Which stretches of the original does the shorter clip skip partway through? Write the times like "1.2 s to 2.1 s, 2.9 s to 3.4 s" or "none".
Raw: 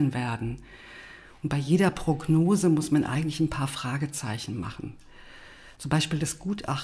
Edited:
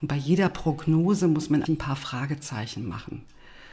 3.1 s to 3.4 s

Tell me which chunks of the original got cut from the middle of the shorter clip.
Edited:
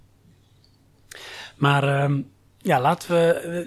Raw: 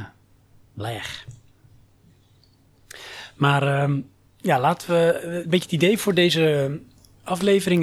none

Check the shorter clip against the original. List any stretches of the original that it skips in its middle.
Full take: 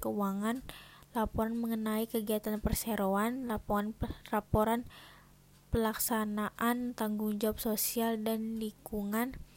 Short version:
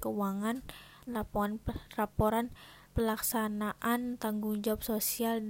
1.1 s to 3.4 s, 5.2 s to 5.6 s

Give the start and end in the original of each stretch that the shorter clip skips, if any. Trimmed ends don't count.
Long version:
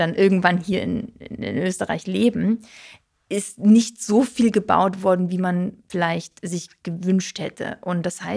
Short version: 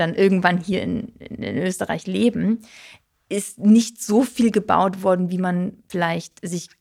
none

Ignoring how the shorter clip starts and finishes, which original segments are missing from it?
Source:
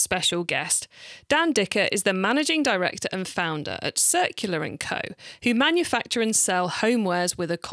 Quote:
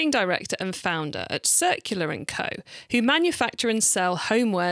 none

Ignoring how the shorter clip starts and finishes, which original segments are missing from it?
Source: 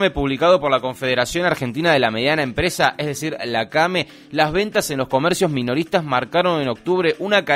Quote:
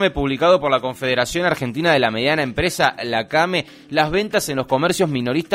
3.0 s to 3.4 s

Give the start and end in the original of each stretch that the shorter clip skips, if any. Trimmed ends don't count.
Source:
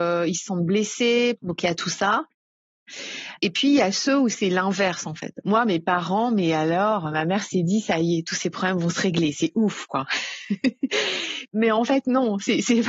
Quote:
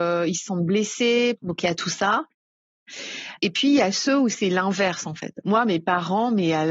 none

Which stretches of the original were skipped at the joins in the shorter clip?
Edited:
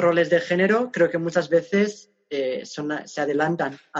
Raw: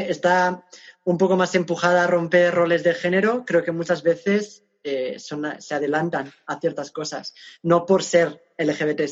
none

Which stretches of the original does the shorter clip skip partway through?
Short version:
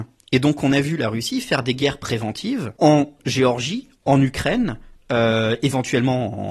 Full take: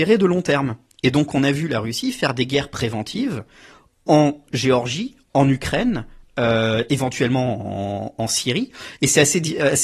3.5 s to 4.0 s

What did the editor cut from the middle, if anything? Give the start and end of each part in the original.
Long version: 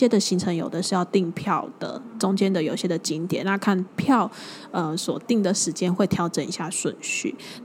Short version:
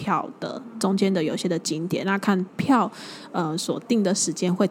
none

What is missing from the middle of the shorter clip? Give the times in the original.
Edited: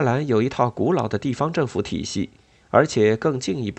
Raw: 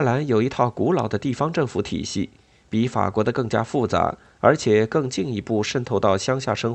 2.6 s to 4.3 s

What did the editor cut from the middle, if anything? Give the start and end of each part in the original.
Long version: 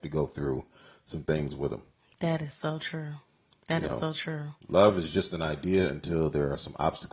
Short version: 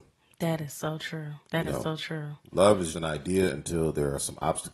3.2 s to 3.6 s, 5.1 s to 5.3 s

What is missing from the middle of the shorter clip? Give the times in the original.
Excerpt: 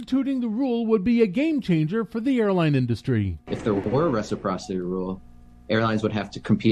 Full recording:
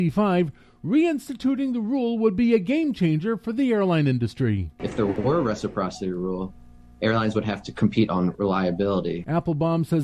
none

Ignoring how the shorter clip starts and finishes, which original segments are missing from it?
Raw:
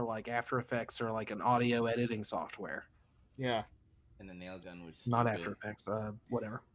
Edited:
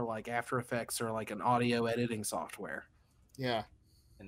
none

